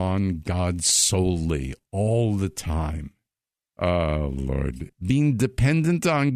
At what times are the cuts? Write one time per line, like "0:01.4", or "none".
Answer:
0:03.7
0:04.9